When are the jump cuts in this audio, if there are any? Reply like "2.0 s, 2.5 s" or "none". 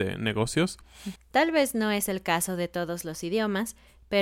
1.2 s